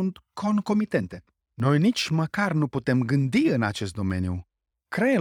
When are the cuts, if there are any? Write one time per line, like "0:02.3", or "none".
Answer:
0:01.4